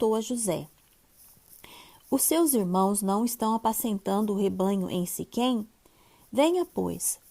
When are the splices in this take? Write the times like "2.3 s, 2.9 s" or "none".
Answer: none